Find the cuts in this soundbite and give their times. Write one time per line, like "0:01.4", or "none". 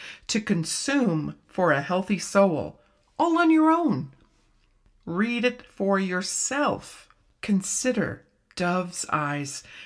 none